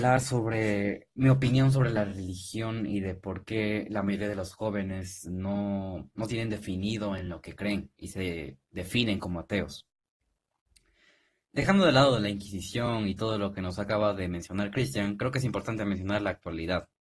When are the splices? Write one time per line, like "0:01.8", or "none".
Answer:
none